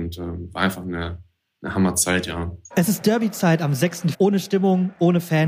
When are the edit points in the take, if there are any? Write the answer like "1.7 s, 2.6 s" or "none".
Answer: 2.7 s, 4.1 s

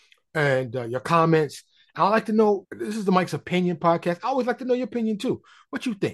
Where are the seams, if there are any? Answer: 2.6 s

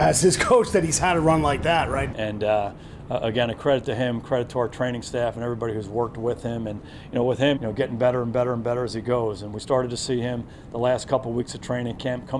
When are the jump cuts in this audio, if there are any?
2.1 s, 7.6 s

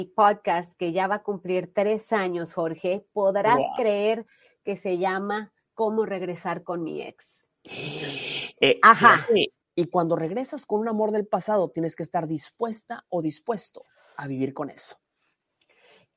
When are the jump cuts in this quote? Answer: 9.6 s

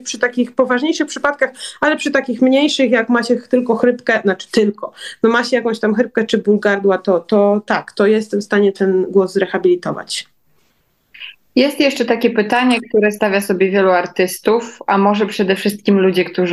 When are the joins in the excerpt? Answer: none

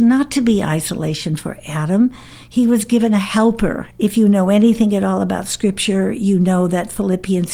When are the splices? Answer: 3.9 s

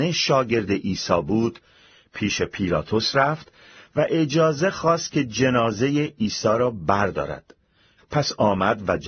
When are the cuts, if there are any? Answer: 8.0 s

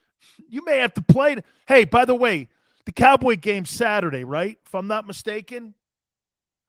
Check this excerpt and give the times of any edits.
none

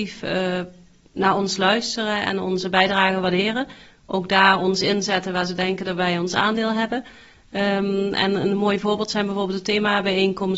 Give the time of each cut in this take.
none

